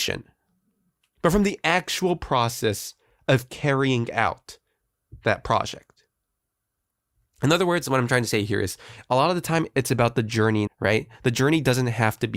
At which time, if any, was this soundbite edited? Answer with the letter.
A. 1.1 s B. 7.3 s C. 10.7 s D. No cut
C